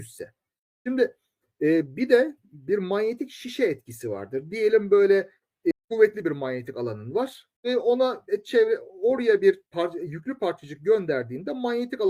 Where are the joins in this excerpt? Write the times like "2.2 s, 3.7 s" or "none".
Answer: 5.7 s, 7.6 s, 9.7 s